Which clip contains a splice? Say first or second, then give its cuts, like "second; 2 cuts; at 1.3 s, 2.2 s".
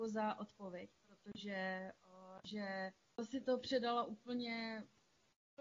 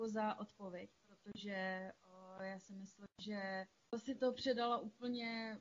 first; 1 cut; at 2.4 s